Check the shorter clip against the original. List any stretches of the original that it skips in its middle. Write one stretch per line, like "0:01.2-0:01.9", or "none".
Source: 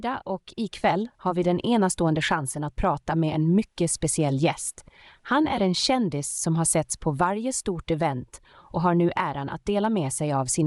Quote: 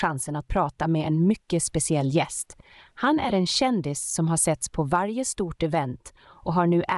none